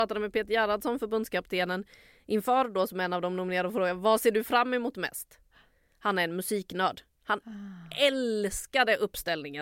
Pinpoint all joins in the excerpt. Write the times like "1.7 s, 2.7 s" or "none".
none